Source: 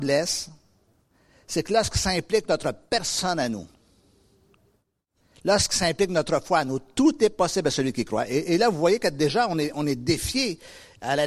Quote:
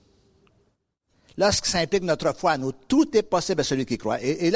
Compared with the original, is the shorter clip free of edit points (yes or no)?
yes